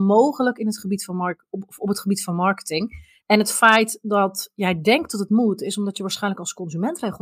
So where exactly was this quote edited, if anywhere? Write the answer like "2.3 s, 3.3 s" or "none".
3.2 s